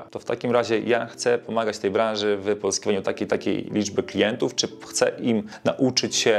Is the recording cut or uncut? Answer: uncut